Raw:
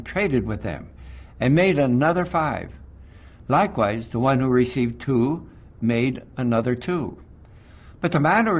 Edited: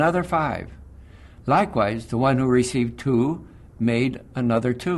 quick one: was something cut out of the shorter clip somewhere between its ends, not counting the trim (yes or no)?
no